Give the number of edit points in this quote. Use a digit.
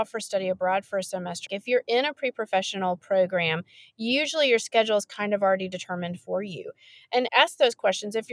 2